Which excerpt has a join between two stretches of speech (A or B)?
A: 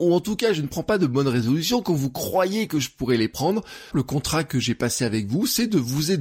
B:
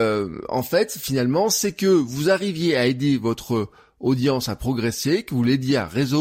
A